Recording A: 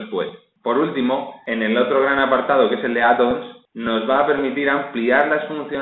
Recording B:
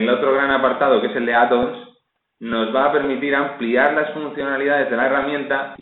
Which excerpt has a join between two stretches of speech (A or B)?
A